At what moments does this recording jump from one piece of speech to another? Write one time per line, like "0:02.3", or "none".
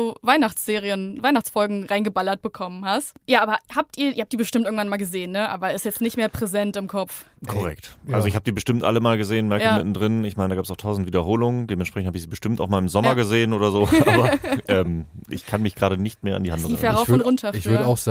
none